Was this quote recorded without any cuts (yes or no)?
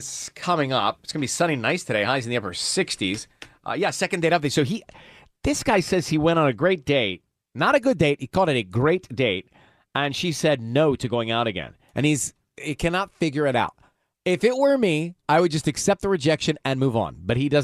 yes